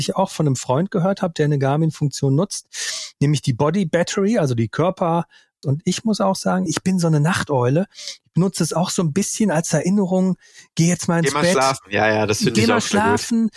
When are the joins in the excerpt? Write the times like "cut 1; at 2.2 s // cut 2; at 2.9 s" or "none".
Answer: cut 1; at 5.6 s // cut 2; at 6.7 s